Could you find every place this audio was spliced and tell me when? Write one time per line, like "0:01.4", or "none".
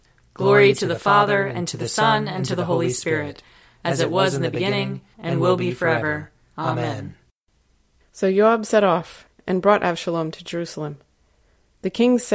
0:05.1
0:08.0
0:09.4